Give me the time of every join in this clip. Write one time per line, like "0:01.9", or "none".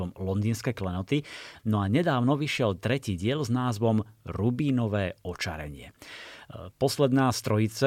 0:01.6